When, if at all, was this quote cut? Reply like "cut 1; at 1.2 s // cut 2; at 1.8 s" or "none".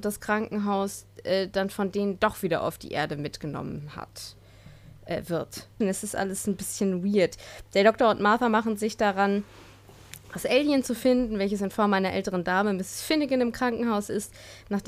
cut 1; at 5.8 s

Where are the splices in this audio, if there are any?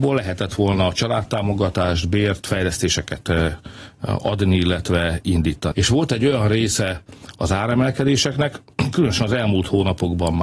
cut 1; at 5.7 s

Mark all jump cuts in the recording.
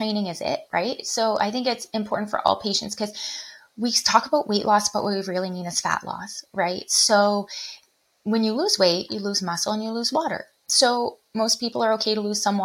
cut 1; at 9.1 s

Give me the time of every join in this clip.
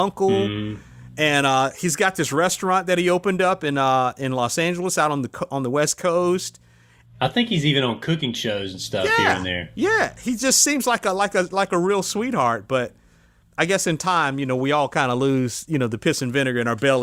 none

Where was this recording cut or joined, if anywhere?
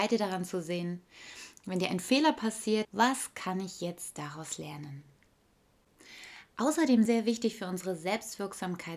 cut 1; at 2.8 s // cut 2; at 7.1 s

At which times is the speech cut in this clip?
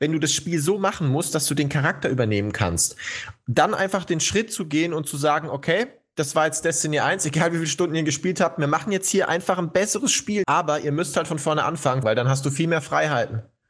cut 1; at 10.4 s // cut 2; at 12.0 s

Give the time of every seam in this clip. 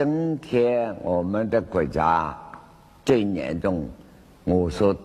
none

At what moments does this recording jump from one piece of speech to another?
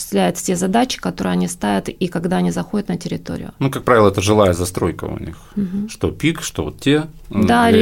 none

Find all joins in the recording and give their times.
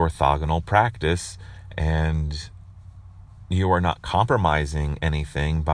none

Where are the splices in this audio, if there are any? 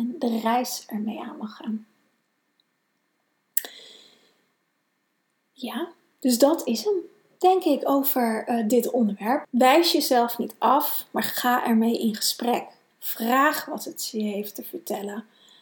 cut 1; at 9.4 s // cut 2; at 12.9 s

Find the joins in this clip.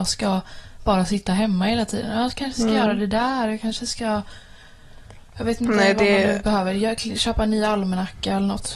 none

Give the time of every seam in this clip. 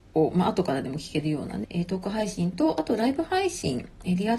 cut 1; at 1.6 s

